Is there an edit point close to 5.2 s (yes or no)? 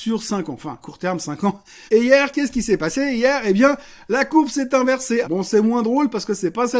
yes